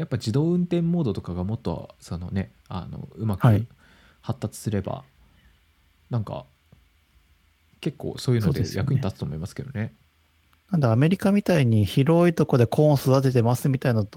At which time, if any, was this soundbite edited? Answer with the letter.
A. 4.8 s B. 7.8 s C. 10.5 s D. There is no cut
C